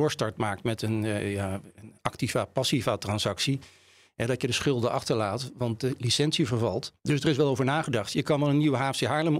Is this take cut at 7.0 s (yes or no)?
yes